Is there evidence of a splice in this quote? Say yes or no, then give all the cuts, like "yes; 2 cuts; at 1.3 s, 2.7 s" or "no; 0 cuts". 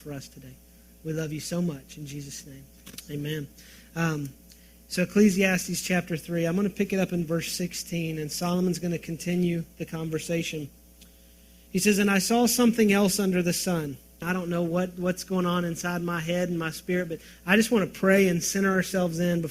yes; 1 cut; at 14.2 s